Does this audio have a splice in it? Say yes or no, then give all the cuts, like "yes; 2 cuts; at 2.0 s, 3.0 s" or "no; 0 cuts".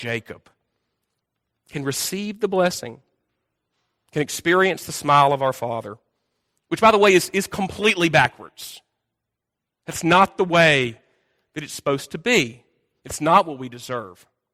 no; 0 cuts